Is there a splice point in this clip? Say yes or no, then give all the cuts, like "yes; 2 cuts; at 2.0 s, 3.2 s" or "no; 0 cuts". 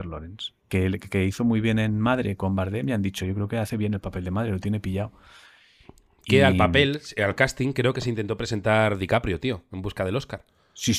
no; 0 cuts